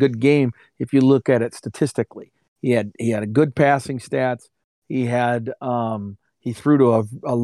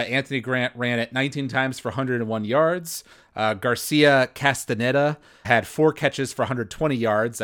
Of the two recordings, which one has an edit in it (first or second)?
second